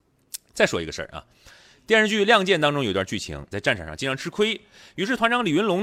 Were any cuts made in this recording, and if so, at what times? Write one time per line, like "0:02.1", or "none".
0:03.5